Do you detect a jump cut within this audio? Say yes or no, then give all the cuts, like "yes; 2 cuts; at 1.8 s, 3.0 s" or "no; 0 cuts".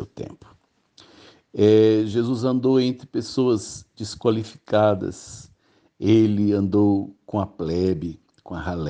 no; 0 cuts